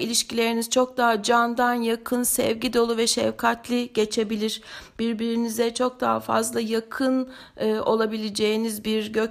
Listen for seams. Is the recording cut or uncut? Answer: uncut